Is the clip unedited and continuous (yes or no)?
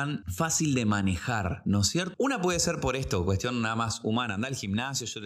no